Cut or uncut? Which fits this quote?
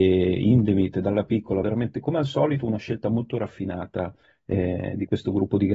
uncut